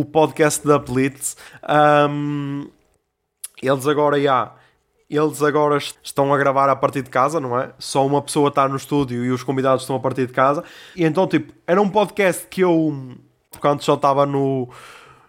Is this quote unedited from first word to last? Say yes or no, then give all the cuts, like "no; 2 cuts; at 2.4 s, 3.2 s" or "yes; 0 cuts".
no; 2 cuts; at 10.9 s, 13.5 s